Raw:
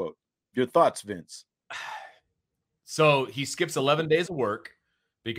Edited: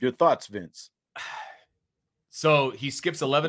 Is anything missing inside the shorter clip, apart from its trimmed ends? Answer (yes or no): no